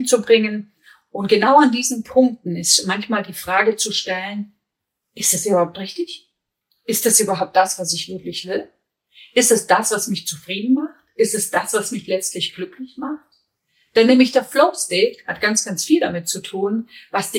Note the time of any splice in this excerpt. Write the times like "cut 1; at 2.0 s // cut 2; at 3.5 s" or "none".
cut 1; at 6.7 s